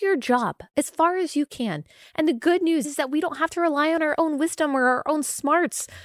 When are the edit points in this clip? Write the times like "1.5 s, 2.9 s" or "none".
2.8 s